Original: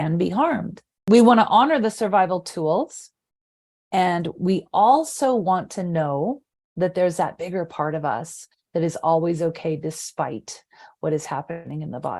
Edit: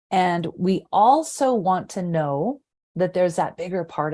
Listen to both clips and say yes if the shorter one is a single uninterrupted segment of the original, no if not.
yes